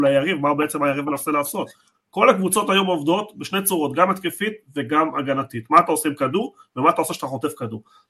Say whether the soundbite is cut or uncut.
cut